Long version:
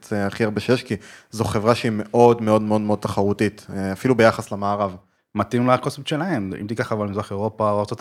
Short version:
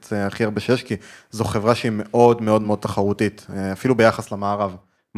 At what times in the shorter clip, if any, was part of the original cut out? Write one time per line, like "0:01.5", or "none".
0:02.6